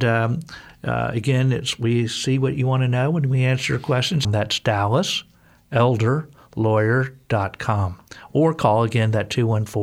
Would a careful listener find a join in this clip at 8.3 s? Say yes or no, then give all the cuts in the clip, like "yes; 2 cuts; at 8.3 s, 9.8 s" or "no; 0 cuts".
no; 1 cut; at 4.2 s